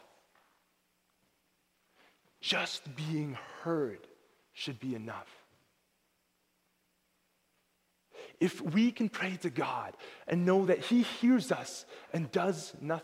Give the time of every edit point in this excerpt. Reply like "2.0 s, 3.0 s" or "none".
none